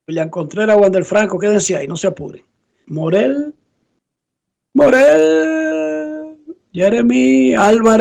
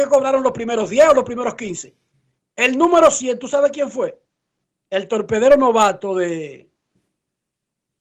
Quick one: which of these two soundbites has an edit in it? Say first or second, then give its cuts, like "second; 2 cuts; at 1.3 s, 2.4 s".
first; 1 cut; at 2.8 s